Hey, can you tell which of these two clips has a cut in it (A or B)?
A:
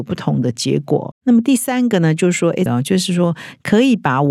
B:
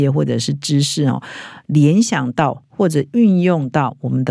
A